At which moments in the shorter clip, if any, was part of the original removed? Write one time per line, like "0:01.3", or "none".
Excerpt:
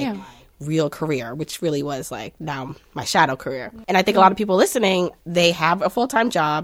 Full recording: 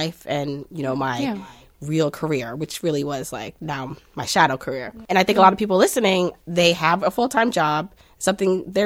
none